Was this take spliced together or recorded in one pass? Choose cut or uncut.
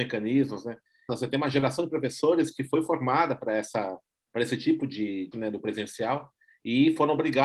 cut